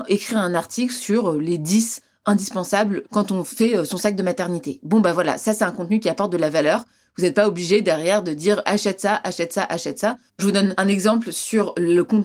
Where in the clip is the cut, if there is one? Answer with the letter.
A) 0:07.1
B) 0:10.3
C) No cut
B